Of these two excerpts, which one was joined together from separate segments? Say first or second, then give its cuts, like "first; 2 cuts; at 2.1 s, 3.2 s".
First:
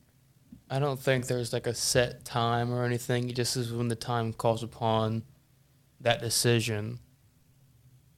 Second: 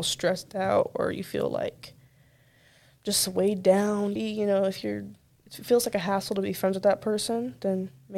second; 1 cut; at 4.2 s